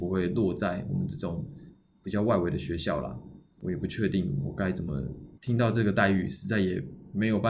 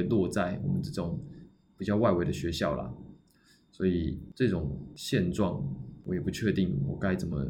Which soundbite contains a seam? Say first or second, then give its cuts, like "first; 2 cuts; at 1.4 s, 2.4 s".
first; 2 cuts; at 3.6 s, 5.4 s